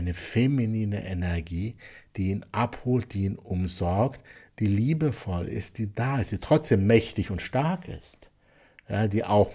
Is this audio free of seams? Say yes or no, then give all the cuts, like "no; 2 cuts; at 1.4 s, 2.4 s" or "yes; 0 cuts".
yes; 0 cuts